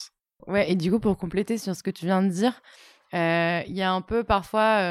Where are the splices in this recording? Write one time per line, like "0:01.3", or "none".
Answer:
none